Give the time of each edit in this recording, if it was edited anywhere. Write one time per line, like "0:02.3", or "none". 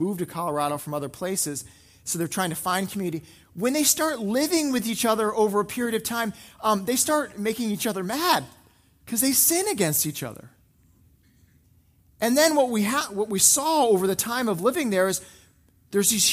none